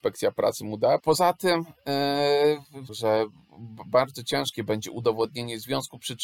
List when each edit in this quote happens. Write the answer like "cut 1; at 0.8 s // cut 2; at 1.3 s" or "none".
cut 1; at 1.0 s // cut 2; at 2.9 s